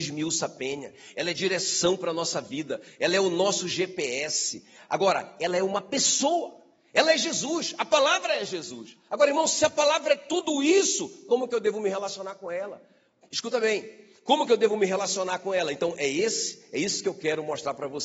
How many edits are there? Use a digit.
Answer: 0